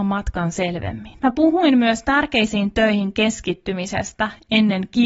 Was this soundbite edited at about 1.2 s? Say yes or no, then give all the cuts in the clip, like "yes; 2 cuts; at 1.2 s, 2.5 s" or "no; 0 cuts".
yes; 1 cut; at 1.2 s